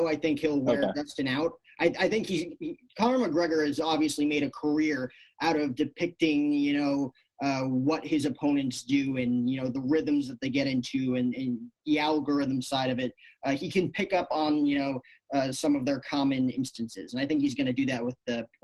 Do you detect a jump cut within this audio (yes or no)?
no